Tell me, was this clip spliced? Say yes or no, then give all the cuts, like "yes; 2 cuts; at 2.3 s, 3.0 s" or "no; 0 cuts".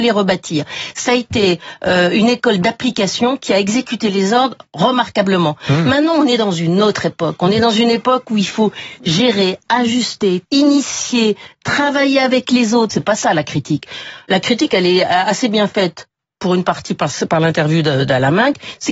yes; 2 cuts; at 10.4 s, 12.9 s